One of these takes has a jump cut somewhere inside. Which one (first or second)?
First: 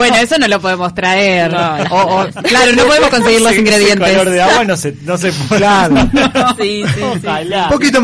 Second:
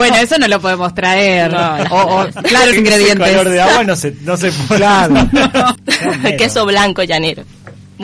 second